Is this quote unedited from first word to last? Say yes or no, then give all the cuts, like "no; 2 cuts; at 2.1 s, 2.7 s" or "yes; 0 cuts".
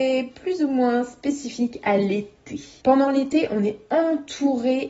no; 1 cut; at 2.8 s